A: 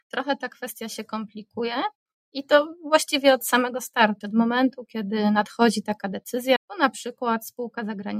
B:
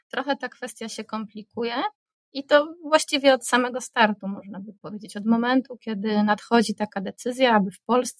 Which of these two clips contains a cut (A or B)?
A